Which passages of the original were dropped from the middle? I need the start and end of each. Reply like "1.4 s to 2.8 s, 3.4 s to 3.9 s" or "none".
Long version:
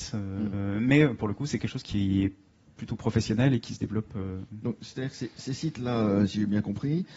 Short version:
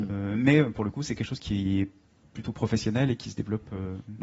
none